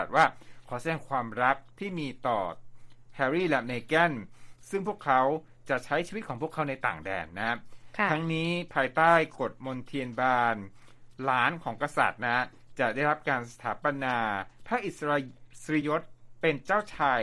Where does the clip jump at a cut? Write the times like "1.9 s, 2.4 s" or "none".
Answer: 15.8 s